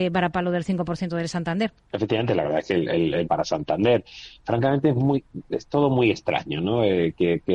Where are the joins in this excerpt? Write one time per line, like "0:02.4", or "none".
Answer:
0:01.8
0:03.2